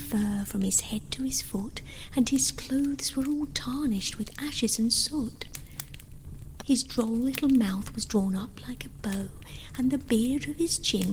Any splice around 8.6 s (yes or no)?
no